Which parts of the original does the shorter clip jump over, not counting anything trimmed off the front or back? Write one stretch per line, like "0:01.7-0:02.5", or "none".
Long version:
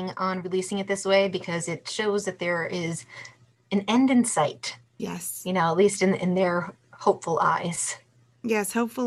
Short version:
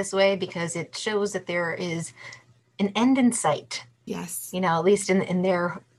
none

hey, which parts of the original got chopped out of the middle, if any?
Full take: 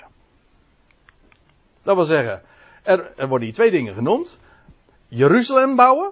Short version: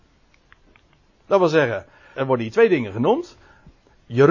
0:02.7-0:03.2

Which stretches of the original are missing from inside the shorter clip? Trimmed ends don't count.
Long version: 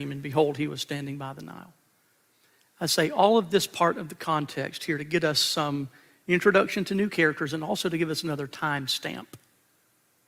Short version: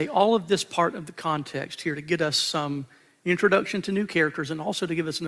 none

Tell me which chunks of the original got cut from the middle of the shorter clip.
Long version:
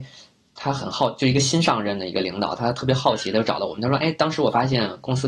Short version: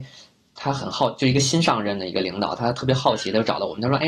none

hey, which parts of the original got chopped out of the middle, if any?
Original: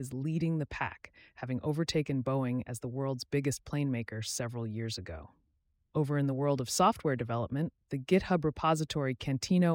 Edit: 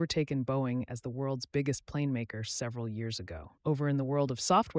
0:05.4-0:05.9

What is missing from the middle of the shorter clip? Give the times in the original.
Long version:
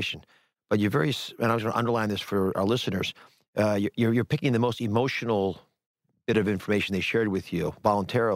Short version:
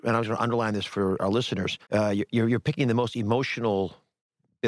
0:03.2-0:03.5

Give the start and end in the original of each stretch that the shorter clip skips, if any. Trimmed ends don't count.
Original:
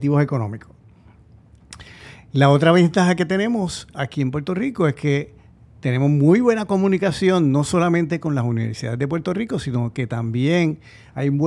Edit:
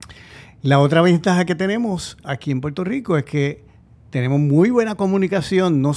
none

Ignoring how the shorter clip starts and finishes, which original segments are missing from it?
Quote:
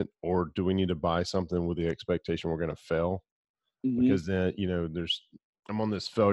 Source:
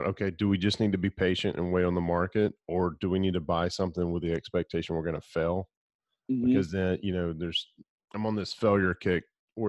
none

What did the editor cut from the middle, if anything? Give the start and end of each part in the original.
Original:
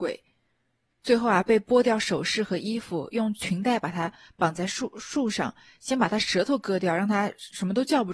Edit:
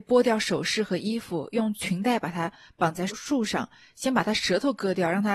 0:04.7-0:04.9

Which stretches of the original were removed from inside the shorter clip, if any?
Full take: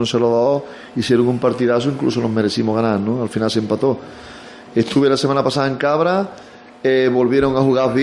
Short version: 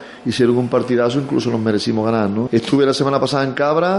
0:03.2-0:04.7

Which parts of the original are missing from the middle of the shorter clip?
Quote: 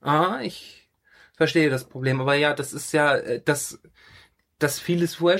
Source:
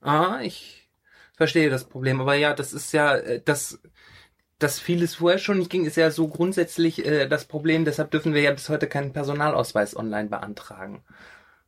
none

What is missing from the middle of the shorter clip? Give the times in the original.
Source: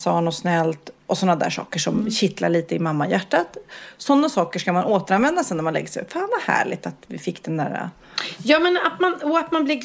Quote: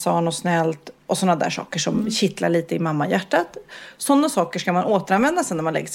none

